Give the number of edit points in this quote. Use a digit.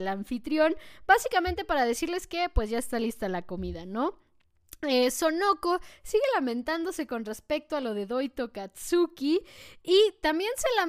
0